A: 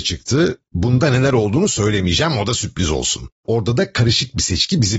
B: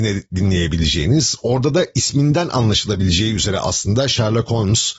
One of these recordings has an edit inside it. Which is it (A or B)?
A